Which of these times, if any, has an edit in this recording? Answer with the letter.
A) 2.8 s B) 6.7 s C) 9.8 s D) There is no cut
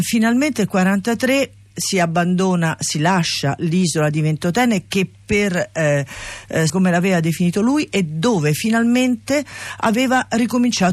B